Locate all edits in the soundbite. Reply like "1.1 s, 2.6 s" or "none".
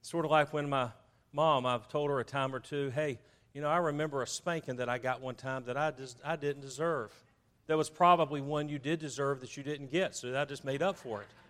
7.5 s